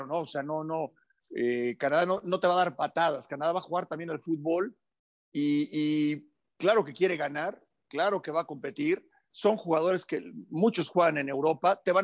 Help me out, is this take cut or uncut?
uncut